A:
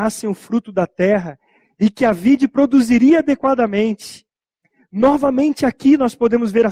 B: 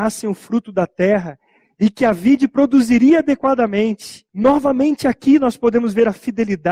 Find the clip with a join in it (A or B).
B